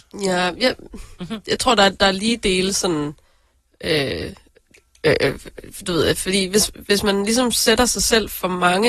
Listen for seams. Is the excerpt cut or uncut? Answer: uncut